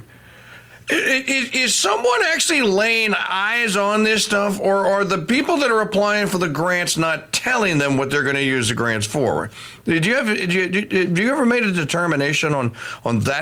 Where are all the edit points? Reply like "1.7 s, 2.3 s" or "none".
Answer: none